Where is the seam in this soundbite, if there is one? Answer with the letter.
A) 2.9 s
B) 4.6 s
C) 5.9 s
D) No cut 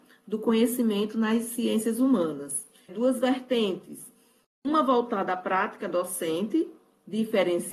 A